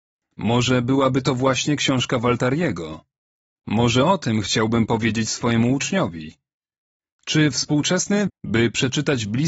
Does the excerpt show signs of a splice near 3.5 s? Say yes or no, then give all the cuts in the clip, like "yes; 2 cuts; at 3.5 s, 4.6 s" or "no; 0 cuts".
no; 1 cut; at 8.3 s